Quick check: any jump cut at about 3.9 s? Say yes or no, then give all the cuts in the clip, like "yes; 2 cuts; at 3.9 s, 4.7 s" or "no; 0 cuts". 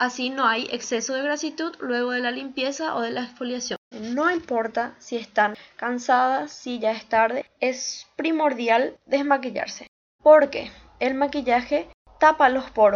yes; 2 cuts; at 3.9 s, 10.2 s